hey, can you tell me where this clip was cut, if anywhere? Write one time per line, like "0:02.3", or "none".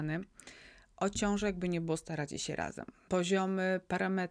0:03.1